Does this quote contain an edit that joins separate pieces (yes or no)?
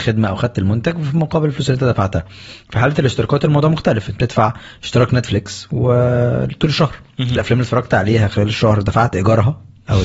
yes